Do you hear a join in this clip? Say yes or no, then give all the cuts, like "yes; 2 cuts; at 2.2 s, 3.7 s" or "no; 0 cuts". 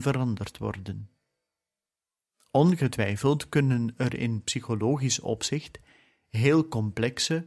no; 0 cuts